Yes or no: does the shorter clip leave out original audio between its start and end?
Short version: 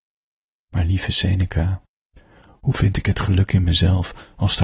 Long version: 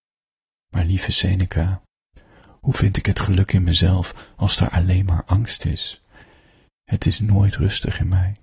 no